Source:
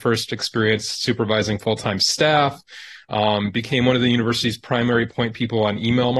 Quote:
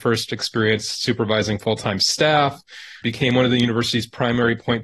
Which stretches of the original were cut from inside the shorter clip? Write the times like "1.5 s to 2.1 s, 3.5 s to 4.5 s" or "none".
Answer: 3.0 s to 3.5 s

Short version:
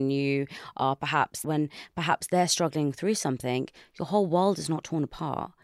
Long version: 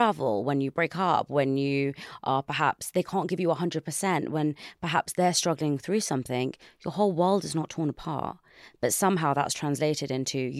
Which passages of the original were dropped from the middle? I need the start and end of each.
2.9 s to 4.3 s

